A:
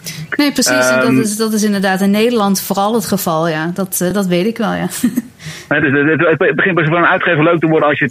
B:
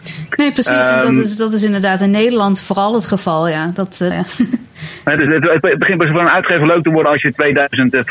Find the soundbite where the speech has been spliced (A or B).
B